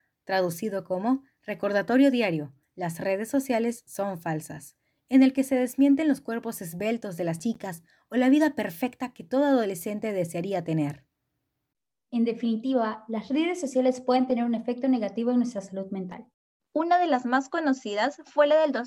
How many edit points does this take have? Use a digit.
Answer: 2